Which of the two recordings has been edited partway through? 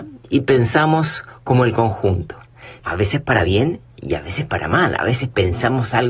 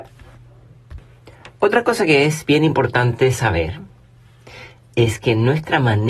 first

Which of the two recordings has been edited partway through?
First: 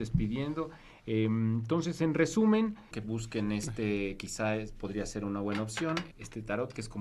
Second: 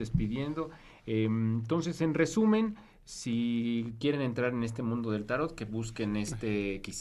first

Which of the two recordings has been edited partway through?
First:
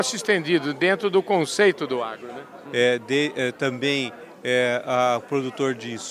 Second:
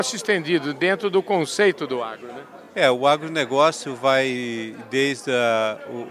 first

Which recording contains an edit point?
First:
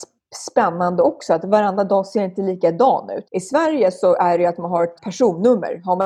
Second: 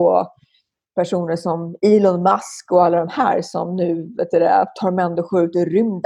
first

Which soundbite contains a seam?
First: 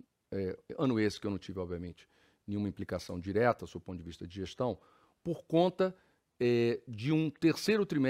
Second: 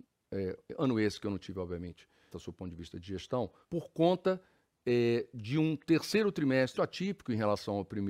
second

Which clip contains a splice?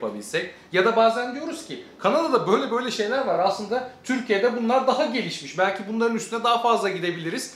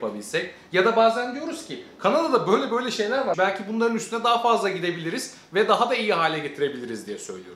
second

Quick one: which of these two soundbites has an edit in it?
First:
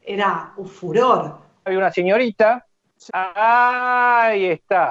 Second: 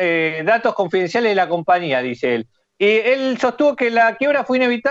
first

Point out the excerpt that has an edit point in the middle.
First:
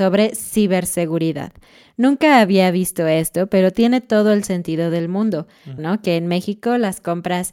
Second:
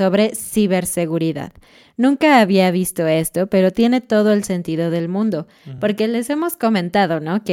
first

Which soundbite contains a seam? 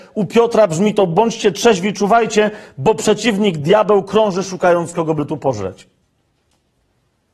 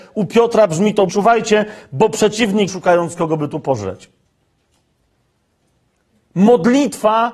second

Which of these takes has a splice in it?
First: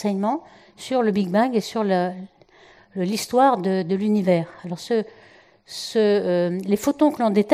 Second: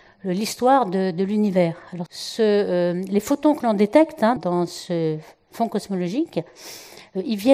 second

